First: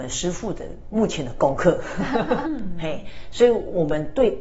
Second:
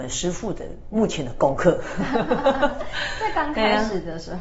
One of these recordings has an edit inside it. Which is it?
first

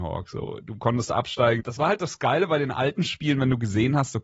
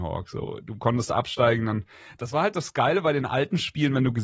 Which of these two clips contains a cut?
first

